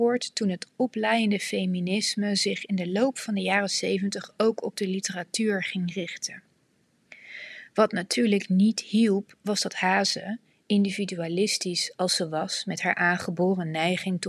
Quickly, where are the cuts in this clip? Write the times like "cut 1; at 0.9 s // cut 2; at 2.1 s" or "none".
none

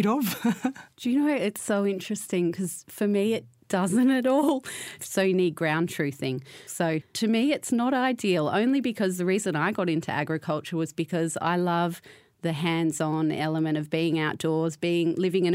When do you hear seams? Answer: cut 1; at 5.0 s // cut 2; at 6.7 s

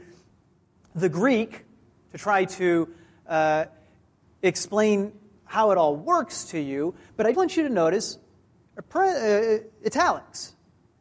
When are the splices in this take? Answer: cut 1; at 7.3 s

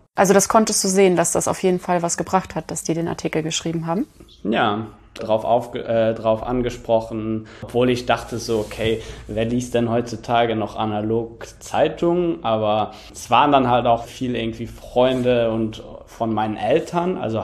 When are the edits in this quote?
cut 1; at 5.2 s // cut 2; at 14.1 s

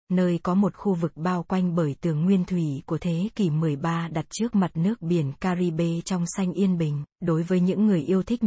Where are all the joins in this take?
cut 1; at 7.1 s

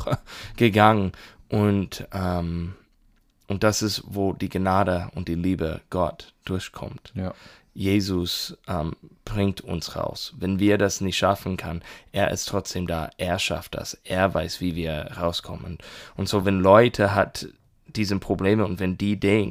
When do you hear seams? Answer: none

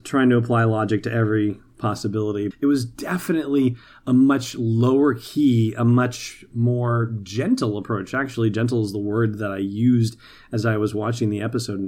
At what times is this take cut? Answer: cut 1; at 2.5 s

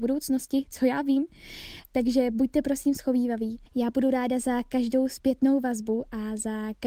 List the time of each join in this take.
cut 1; at 1.8 s // cut 2; at 3.7 s

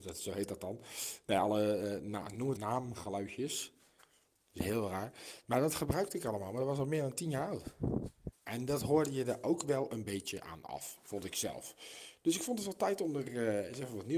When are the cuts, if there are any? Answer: cut 1; at 2.6 s

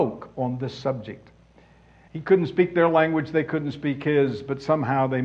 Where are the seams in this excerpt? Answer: cut 1; at 2.1 s

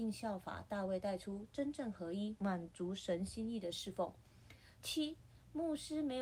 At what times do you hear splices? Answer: cut 1; at 2.4 s // cut 2; at 4.8 s

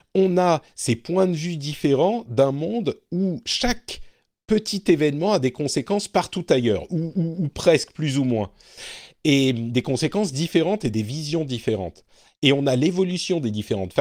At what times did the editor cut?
none

